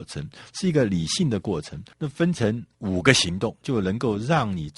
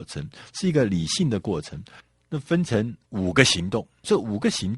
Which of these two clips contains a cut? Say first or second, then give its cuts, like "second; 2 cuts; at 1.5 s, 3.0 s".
first; 2 cuts; at 1.9 s, 3.6 s